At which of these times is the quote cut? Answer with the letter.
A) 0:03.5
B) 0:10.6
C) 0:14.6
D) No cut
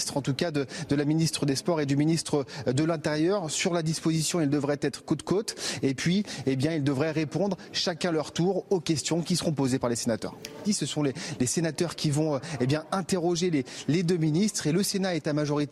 B